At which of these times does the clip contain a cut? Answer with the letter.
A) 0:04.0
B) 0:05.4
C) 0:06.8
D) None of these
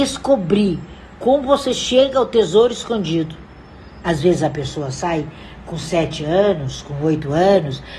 A